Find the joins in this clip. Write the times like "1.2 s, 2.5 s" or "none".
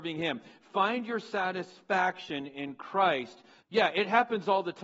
3.6 s

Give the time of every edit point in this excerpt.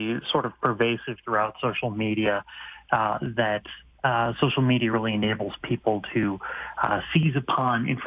none

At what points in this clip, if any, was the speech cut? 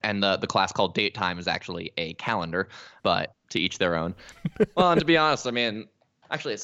4.3 s

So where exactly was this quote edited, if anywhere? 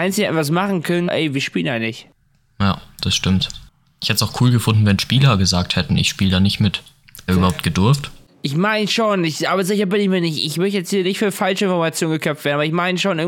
1.1 s, 7.3 s

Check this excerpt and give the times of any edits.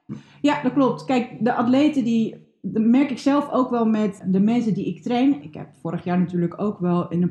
5.4 s

